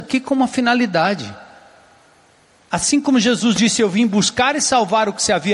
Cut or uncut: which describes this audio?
uncut